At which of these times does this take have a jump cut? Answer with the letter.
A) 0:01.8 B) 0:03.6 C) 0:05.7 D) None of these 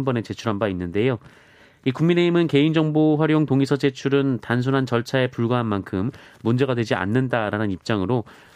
D